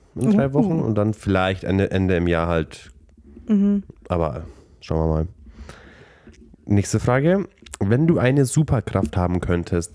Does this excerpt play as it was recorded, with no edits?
yes; 0 cuts

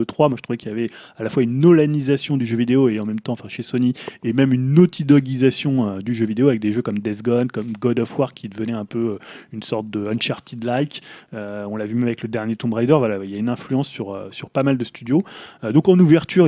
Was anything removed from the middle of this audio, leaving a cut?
no; 0 cuts

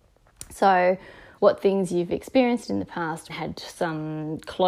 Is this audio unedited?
no; 2 cuts; at 1.4 s, 3.3 s

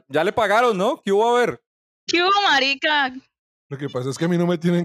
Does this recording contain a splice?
yes; 1 cut; at 3.5 s

